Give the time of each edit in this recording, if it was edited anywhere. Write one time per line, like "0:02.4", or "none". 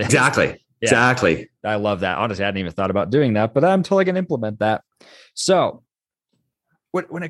0:01.6

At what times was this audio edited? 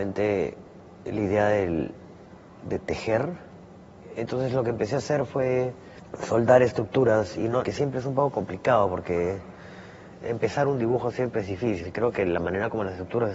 0:07.6
0:11.8

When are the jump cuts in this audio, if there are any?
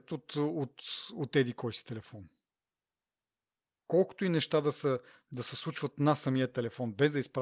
none

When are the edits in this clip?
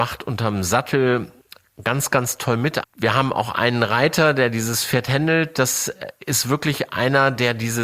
0:02.8

